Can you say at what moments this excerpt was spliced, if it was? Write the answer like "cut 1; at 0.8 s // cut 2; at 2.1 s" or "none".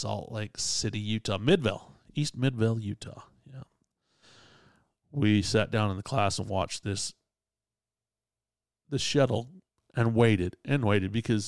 none